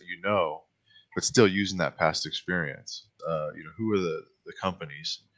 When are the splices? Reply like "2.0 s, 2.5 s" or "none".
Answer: 3.2 s